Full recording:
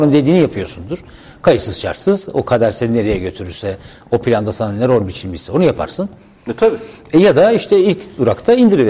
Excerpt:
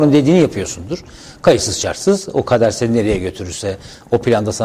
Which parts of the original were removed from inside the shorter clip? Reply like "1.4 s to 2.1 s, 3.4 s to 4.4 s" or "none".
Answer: none

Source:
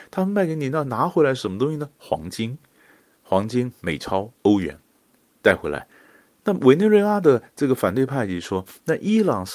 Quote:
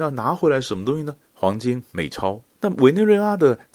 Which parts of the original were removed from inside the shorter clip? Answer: 1.9 s to 3.1 s, 4.4 s to 6.3 s

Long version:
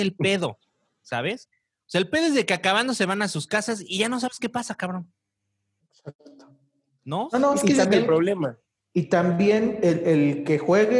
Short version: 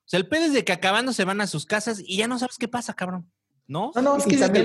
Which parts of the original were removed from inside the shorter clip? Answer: 5.3 s to 6.9 s

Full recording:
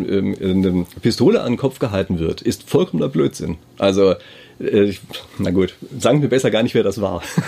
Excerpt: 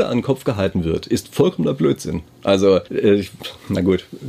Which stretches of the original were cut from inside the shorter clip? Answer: 4.2 s to 4.6 s

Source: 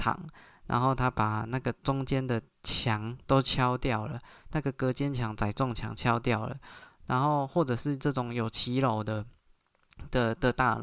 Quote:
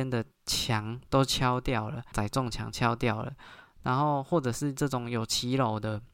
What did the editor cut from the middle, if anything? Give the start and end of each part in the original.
4.3 s to 5.4 s

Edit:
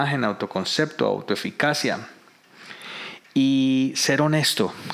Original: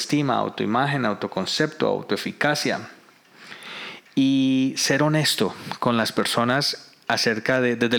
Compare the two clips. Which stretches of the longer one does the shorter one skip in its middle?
none

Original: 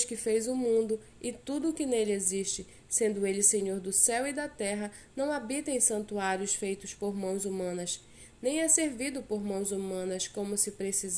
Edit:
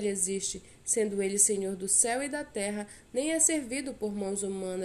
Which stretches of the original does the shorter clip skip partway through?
5.1 s to 8.3 s

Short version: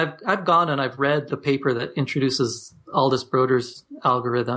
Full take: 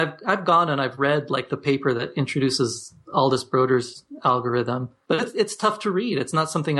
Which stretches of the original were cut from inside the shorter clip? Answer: 1.3 s to 1.5 s

